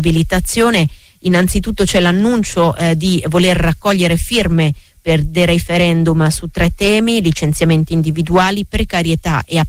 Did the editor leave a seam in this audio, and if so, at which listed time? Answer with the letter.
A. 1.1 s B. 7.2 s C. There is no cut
C